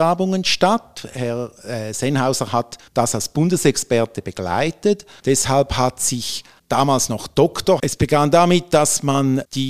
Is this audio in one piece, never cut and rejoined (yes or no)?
no